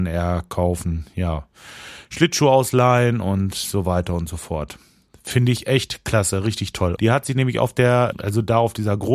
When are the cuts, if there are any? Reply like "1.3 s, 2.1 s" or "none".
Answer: 7.0 s, 8.1 s